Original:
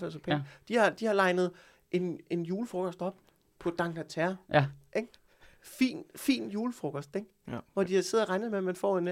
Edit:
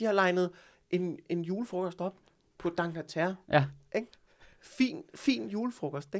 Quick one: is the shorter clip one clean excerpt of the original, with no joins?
yes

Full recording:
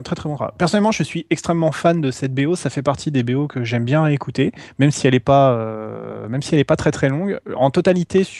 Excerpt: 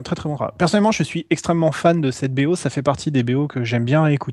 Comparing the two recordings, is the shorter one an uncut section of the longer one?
yes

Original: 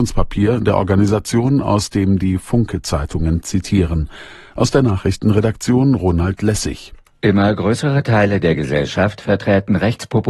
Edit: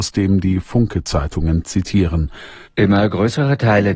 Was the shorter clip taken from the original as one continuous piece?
no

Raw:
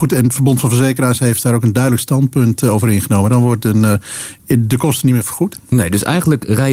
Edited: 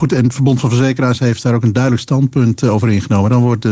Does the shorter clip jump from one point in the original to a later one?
no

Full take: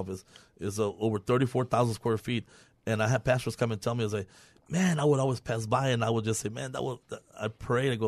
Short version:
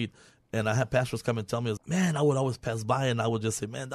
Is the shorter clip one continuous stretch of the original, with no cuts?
no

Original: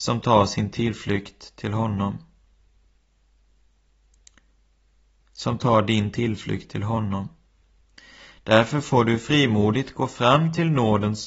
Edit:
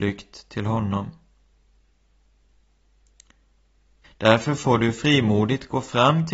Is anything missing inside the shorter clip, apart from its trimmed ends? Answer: yes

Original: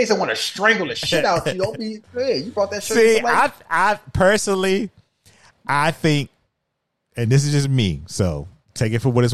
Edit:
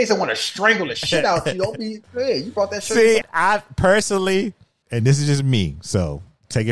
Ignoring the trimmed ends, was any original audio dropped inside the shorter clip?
yes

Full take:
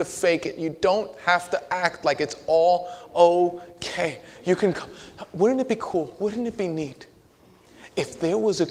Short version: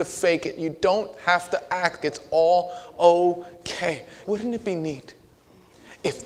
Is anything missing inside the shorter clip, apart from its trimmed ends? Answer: yes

